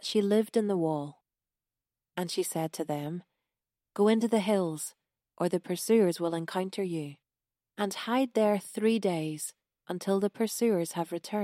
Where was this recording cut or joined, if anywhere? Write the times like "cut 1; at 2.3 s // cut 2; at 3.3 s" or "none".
none